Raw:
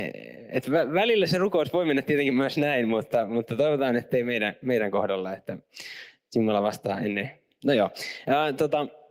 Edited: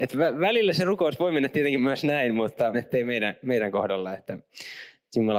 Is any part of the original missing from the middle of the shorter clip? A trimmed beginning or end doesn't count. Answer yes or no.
yes